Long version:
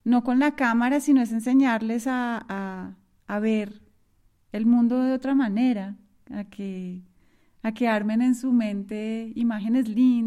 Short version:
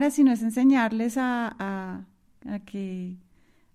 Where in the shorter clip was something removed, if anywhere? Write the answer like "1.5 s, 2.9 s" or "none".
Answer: 2.3 s